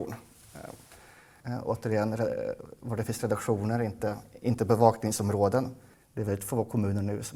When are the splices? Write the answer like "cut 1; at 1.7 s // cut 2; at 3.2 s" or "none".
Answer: cut 1; at 1.4 s // cut 2; at 5.9 s

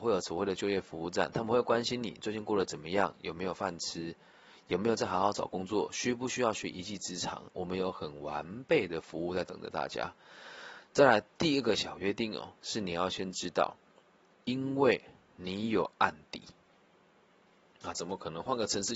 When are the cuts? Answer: cut 1; at 17.9 s

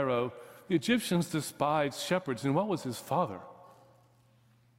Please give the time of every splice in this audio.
none

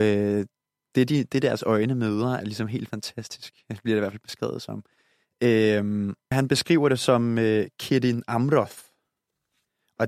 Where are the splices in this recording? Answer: cut 1; at 2.4 s // cut 2; at 6.3 s

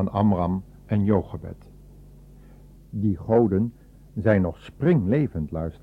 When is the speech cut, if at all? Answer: cut 1; at 2.7 s

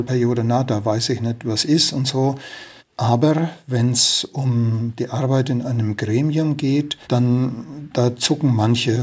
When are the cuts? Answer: cut 1; at 2.8 s // cut 2; at 7.0 s

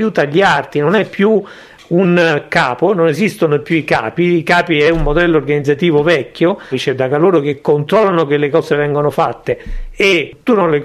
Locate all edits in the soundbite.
cut 1; at 6.7 s

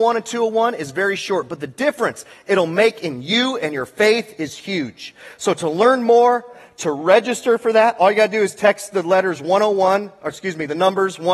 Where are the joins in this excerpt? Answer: none

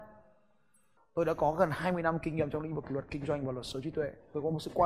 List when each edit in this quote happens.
cut 1; at 1.0 s

